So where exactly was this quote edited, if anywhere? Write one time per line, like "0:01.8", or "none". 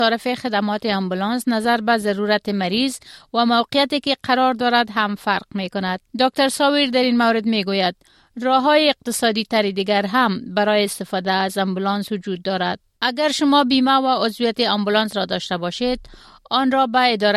0:06.1
0:13.0